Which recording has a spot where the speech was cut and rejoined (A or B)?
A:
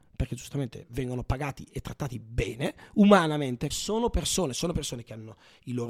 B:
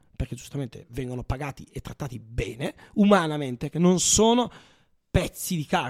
A